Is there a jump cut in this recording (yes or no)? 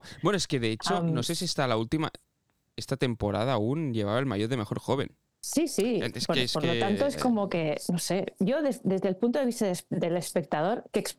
no